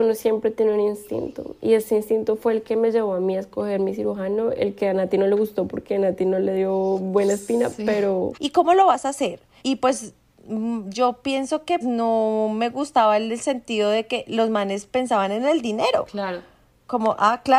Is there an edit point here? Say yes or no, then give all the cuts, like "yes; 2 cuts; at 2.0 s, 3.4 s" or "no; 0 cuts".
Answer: yes; 3 cuts; at 8.3 s, 9.6 s, 11.8 s